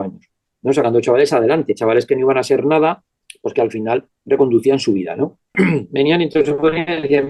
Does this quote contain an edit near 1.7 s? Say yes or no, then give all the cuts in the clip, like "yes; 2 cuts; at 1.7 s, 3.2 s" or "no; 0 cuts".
no; 1 cut; at 5.5 s